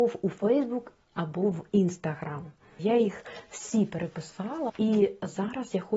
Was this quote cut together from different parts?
yes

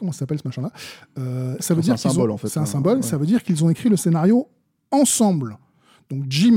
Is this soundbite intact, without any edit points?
no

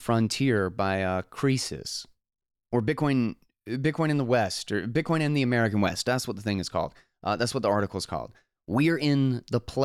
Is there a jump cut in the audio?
yes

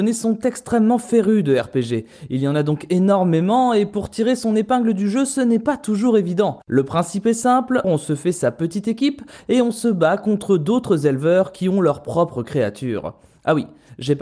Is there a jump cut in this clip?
yes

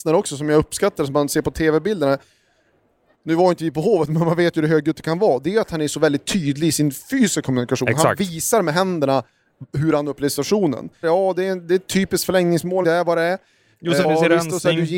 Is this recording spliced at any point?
yes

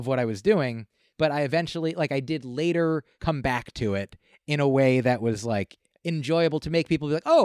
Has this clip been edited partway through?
yes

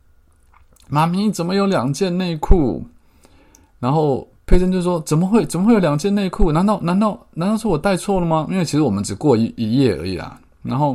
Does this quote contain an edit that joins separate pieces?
no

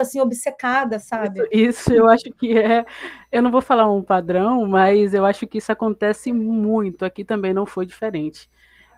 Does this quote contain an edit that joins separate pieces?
no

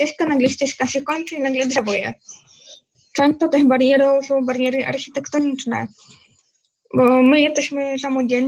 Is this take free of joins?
no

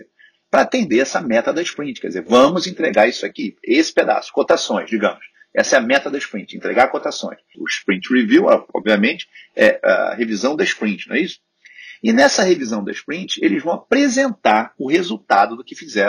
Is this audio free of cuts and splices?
no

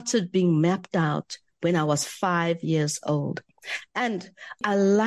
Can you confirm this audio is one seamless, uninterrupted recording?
yes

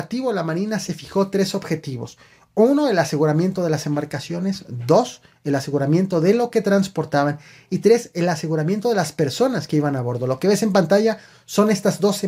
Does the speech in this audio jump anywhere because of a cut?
no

